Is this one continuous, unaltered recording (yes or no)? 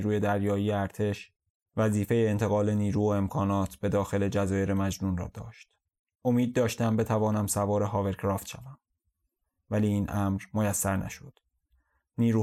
yes